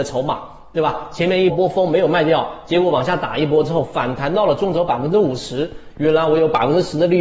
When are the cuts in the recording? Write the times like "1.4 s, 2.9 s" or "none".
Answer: 1.5 s